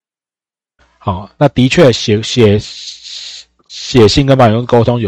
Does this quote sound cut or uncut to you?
uncut